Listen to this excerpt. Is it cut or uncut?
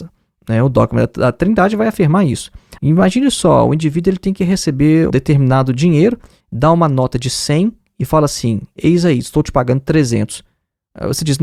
cut